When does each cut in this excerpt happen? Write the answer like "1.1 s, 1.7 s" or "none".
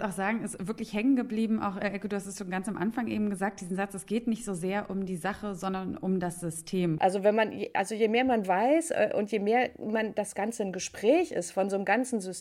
7.0 s